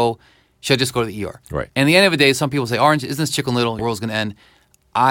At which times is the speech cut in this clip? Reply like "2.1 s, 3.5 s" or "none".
1.7 s, 3.8 s